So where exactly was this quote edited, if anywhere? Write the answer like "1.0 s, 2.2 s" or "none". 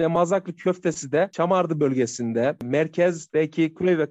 2.6 s